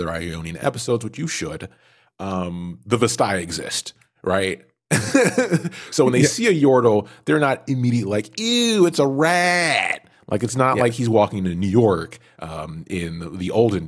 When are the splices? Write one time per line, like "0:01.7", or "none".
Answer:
none